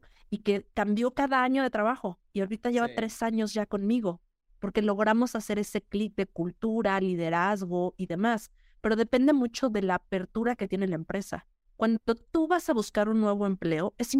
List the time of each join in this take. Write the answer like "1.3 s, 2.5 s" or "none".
none